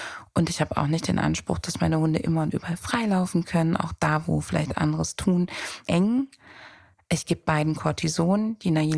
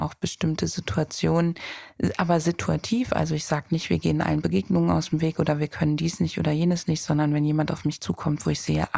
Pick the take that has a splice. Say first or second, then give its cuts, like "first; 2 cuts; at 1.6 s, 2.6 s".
first; 1 cut; at 5.8 s